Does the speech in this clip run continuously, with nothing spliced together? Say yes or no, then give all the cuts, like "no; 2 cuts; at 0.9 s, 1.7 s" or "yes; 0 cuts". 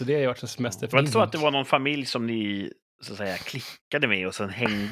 no; 1 cut; at 0.9 s